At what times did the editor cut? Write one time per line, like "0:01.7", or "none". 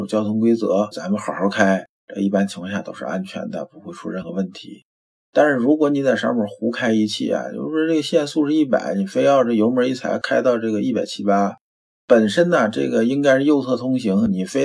none

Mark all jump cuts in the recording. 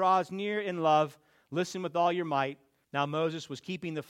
0:02.8

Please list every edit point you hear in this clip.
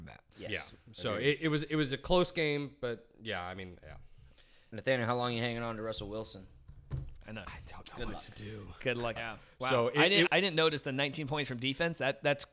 0:07.4
0:09.2
0:10.3

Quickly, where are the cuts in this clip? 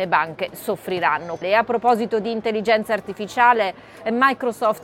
0:01.4

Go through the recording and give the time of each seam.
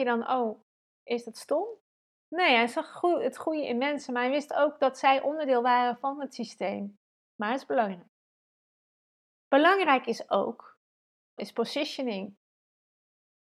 0:07.2
0:11.4

